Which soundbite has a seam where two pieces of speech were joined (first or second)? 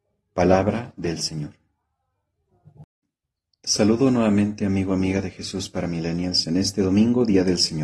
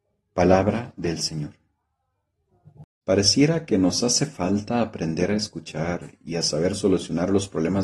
second